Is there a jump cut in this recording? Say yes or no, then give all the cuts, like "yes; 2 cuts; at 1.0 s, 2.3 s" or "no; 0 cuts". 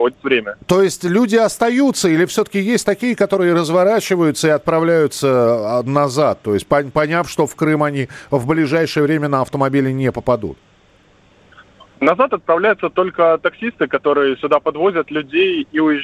no; 0 cuts